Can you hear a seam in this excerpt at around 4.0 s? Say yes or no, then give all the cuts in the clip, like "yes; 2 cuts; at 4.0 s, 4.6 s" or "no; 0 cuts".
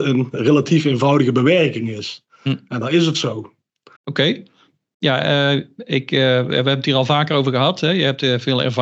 yes; 1 cut; at 4.0 s